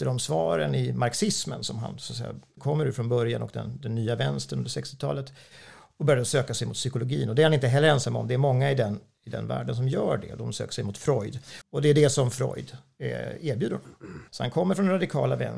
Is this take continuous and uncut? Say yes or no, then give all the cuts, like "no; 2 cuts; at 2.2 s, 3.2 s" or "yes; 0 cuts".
no; 3 cuts; at 2.6 s, 11.6 s, 14.3 s